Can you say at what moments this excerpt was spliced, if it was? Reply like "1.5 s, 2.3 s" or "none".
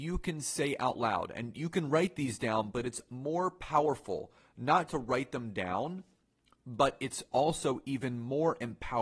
4.9 s